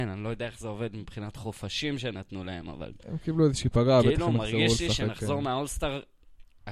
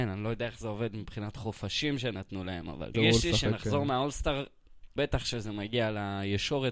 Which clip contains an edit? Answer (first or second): second